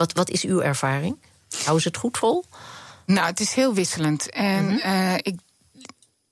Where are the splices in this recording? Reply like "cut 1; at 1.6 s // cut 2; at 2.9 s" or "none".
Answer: none